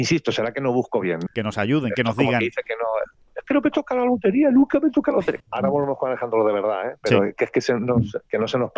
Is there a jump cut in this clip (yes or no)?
yes